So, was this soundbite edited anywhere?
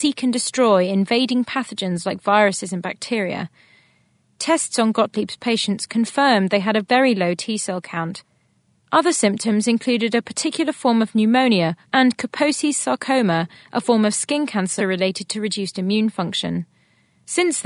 yes; 2 cuts; at 11.8 s, 14.8 s

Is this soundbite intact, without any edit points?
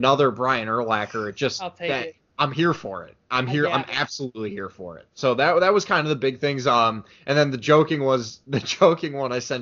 yes; 0 cuts

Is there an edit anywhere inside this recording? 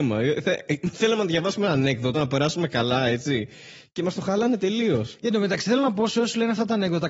no; 0 cuts

